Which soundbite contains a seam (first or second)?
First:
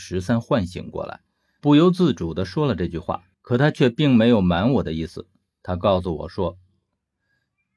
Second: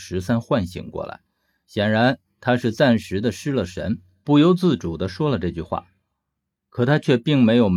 first